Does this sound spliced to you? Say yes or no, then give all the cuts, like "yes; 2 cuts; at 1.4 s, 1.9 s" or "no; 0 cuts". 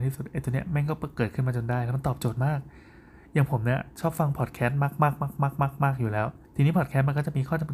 yes; 1 cut; at 6.4 s